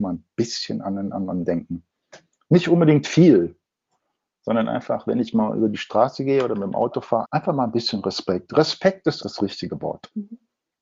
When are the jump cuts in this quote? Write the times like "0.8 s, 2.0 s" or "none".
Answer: 7.3 s, 9.2 s